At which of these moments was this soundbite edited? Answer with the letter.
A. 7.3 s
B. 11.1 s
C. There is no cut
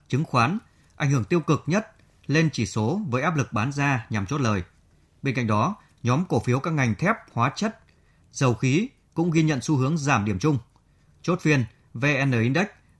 C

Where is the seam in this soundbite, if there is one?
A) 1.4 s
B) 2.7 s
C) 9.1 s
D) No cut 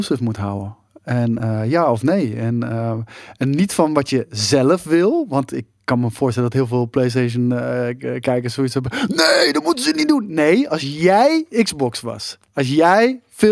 D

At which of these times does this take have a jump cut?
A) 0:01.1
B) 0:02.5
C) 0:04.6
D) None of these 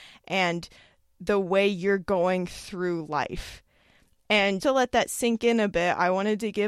C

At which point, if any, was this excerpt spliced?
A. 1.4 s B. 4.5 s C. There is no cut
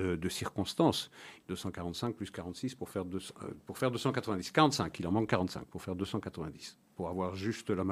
A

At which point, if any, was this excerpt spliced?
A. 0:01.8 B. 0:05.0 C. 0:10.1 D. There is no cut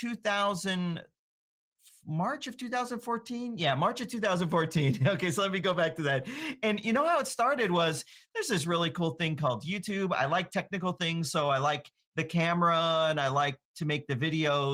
D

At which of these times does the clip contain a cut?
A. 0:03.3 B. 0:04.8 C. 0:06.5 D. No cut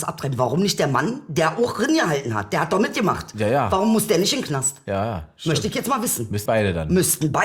C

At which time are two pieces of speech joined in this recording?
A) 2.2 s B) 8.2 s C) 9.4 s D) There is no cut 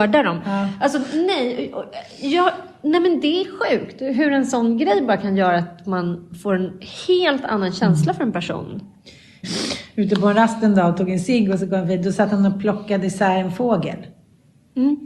C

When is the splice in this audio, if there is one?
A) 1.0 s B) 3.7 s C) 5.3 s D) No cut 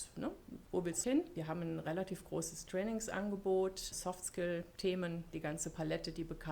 A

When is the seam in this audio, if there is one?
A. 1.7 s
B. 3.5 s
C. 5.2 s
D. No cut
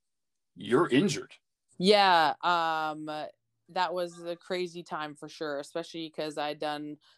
A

